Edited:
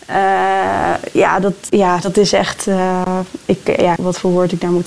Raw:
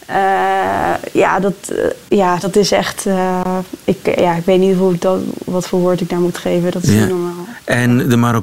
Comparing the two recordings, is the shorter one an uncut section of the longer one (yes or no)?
no